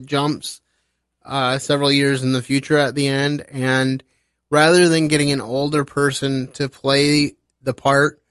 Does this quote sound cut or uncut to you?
uncut